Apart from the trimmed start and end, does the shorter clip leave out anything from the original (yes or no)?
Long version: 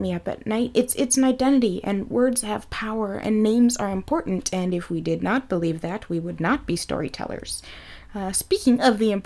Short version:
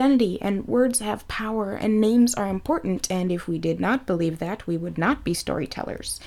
no